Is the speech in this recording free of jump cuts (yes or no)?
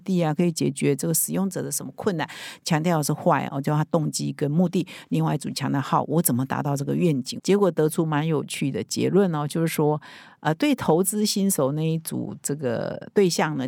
yes